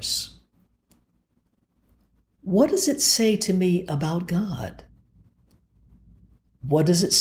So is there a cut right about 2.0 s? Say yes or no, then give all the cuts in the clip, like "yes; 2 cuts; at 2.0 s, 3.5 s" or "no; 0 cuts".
no; 0 cuts